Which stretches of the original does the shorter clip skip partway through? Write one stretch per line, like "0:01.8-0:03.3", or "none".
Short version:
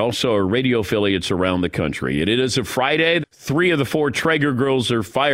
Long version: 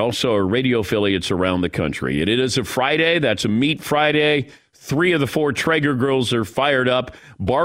0:03.2-0:04.6